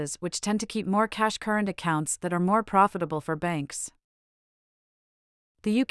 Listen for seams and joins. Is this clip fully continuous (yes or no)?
yes